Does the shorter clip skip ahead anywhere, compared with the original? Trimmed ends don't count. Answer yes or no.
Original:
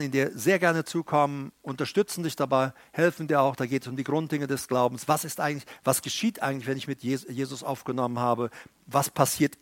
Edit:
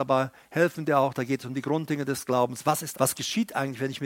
yes